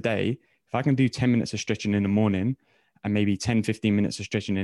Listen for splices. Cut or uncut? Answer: uncut